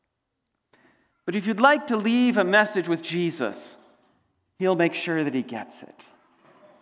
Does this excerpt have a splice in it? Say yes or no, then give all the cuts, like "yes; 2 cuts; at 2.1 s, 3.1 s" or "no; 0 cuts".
yes; 1 cut; at 1.1 s